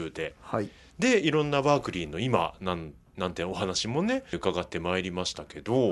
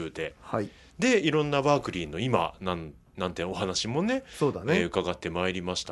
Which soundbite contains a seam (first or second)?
first